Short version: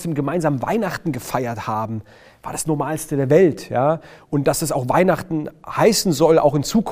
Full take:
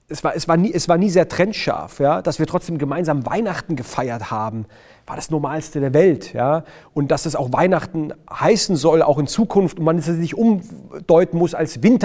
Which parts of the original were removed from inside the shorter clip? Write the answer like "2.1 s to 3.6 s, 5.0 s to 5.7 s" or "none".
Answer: none